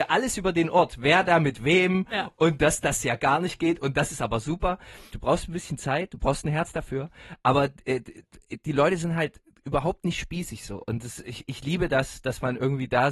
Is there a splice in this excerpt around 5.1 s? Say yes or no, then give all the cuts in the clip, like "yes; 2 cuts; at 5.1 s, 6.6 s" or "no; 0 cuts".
yes; 1 cut; at 5.1 s